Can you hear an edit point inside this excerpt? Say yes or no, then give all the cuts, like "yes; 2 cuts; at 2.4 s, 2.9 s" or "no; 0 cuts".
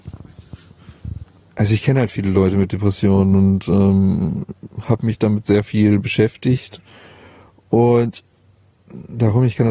no; 0 cuts